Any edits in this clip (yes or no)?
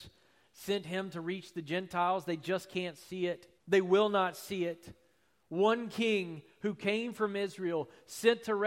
yes